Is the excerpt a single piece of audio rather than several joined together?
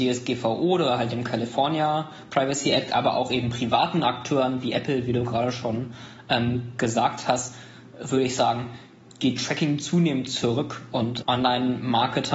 no; 1 cut; at 11.2 s

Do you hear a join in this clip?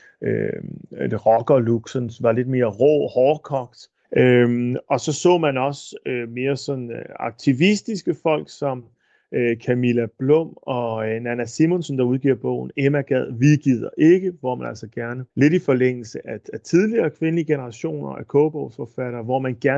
yes; 2 cuts; at 4.0 s, 15.3 s

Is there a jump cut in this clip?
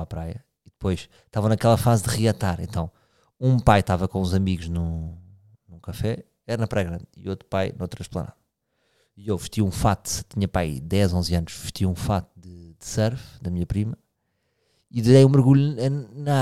no; 0 cuts

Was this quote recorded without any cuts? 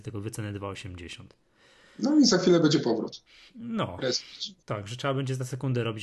no; 1 cut; at 4.6 s

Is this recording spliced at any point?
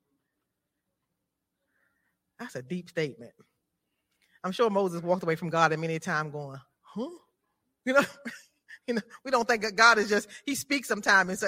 no; 0 cuts

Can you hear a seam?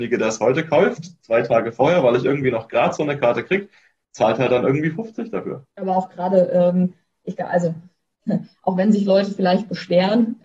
yes; 1 cut; at 5.7 s

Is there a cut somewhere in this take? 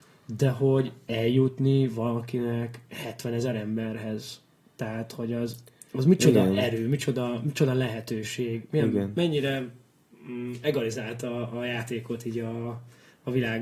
no; 0 cuts

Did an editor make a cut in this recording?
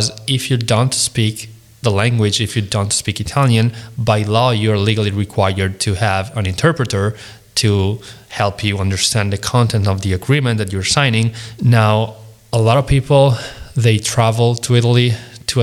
yes; 1 cut; at 11.6 s

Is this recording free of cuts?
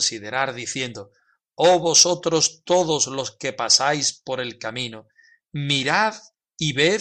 yes; 0 cuts

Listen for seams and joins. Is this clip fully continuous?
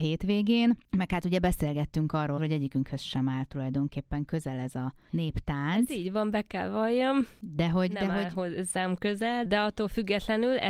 no; 2 cuts; at 2.4 s, 9.4 s

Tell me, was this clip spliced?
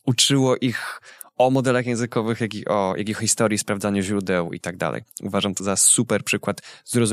no; 0 cuts

